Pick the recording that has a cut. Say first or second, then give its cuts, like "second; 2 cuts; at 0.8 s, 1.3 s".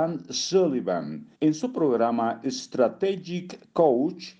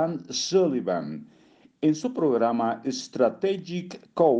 first; 1 cut; at 1.4 s